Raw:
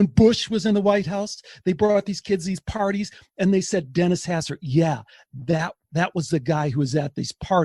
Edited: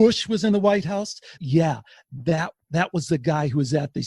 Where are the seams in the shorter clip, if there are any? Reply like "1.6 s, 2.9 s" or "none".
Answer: 1.4 s